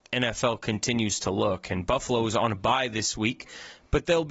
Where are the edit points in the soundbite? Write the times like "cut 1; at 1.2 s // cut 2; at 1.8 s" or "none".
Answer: none